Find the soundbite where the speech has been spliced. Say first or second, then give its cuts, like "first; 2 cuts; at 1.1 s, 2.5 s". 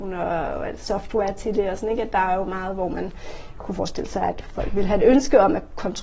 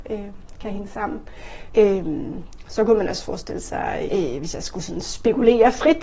second; 2 cuts; at 1.7 s, 4.1 s